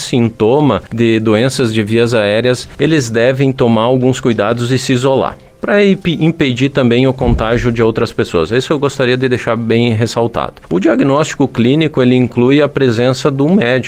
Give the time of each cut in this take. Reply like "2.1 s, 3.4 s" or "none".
none